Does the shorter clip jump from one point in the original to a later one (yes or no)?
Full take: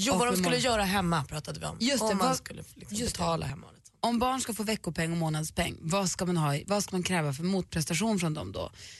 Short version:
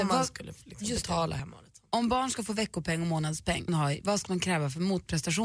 yes